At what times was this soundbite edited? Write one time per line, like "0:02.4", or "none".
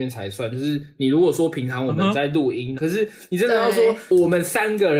0:02.7

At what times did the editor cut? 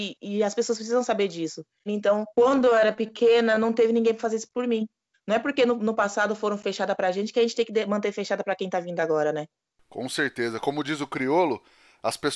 0:01.9
0:05.1

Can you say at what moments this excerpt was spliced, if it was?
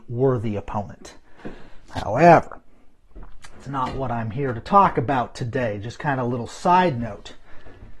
0:01.8

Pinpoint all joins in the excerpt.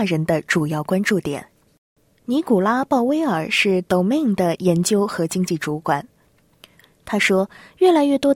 0:01.6

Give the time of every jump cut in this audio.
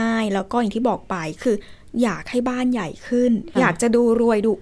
0:03.5

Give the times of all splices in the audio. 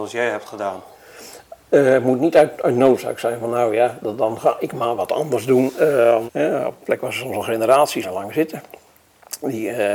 0:06.3
0:08.0

